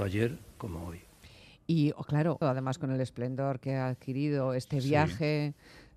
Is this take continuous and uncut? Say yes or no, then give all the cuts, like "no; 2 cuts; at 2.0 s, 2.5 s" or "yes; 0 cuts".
no; 1 cut; at 2.4 s